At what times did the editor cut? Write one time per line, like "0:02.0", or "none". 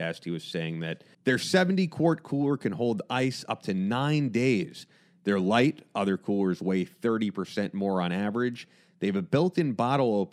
0:01.1